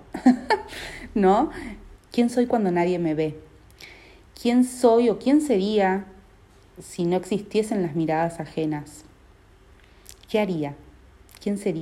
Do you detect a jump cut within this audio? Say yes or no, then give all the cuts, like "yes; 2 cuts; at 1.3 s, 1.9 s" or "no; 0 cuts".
yes; 1 cut; at 2.0 s